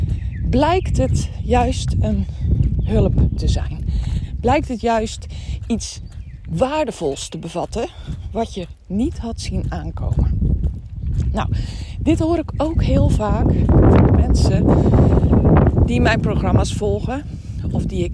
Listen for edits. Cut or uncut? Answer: uncut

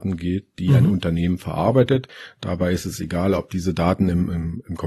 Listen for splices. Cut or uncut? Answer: uncut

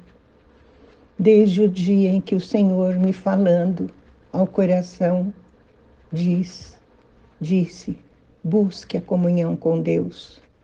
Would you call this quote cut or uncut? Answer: uncut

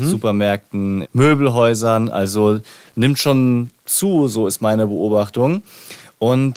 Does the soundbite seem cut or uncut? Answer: cut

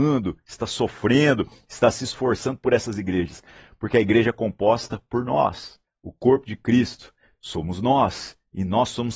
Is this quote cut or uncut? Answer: uncut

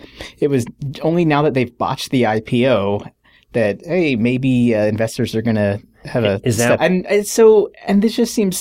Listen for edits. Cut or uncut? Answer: cut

